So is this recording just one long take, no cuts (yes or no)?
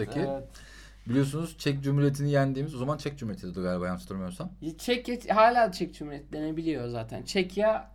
yes